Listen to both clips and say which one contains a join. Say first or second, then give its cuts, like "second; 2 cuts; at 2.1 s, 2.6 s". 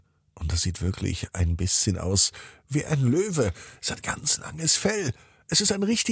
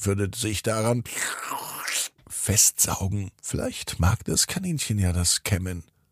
second; 1 cut; at 3.3 s